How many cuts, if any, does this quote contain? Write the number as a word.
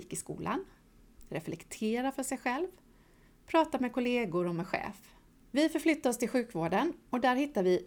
one